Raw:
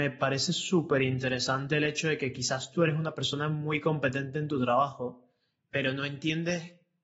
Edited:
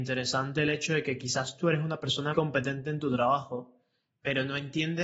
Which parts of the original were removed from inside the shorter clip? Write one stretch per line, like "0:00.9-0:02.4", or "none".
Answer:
0:03.5-0:03.8